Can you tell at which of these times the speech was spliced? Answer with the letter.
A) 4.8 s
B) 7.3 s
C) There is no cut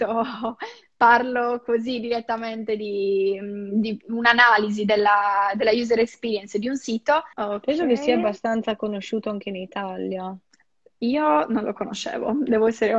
B